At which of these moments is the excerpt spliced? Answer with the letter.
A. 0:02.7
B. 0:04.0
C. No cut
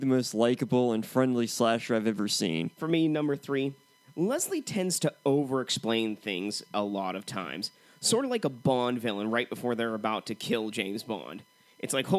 A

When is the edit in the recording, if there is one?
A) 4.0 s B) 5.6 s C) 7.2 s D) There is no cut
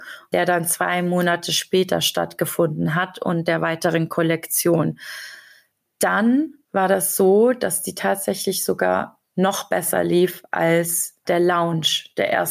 D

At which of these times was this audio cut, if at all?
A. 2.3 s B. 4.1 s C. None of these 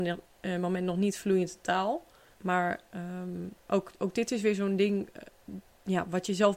A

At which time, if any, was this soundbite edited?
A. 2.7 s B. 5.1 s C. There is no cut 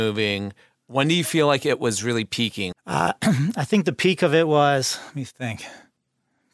A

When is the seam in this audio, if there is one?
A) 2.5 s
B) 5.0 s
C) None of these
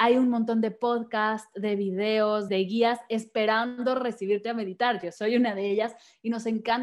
A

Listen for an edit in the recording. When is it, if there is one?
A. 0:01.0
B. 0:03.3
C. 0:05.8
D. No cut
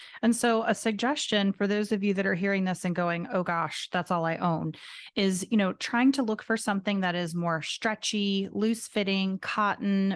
D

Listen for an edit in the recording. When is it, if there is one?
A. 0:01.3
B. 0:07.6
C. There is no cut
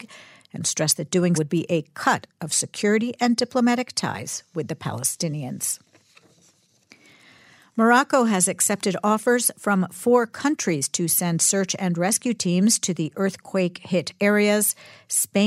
A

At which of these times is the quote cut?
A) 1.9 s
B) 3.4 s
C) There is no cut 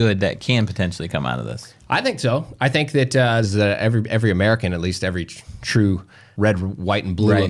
B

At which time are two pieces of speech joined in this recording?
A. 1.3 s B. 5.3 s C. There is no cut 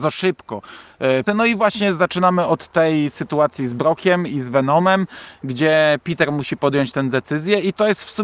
A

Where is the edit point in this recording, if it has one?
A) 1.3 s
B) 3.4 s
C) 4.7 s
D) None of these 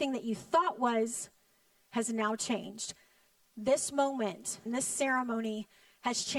C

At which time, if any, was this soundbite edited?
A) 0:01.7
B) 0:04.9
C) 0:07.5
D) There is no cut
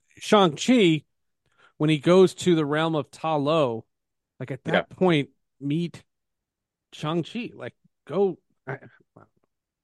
D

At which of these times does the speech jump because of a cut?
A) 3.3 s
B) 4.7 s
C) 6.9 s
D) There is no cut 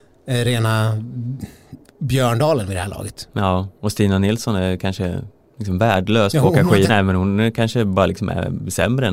C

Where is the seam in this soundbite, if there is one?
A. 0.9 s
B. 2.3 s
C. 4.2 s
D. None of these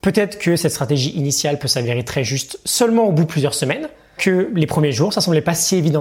C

